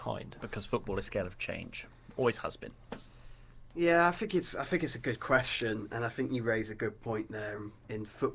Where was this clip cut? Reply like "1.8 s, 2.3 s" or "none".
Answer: none